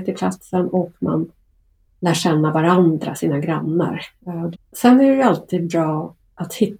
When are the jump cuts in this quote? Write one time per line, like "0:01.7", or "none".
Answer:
0:04.5